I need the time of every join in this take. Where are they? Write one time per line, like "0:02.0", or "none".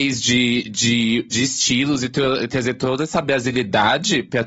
0:01.3